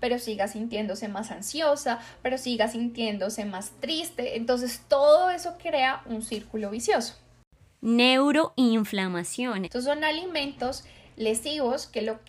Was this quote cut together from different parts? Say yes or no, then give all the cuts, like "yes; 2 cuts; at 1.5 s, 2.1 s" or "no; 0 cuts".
yes; 1 cut; at 9.6 s